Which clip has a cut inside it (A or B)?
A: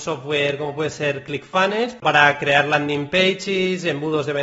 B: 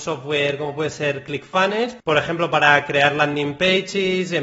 A